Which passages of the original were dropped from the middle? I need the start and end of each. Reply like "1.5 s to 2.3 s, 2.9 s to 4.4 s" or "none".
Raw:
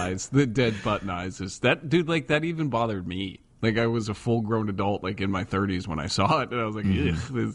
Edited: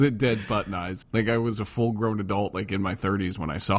1.4 s to 3.5 s